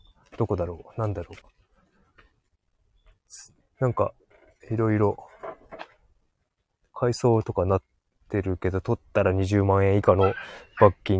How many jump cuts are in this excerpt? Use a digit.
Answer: 1